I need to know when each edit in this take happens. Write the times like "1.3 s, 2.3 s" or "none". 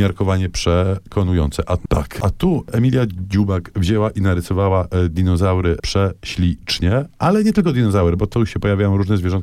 1.9 s